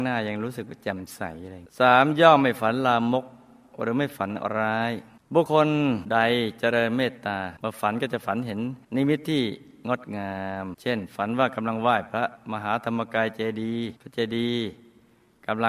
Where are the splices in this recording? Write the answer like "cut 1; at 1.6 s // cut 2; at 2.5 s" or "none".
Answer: cut 1; at 5.5 s // cut 2; at 14.0 s

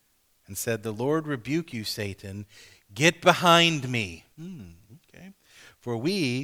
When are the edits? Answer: cut 1; at 4.3 s

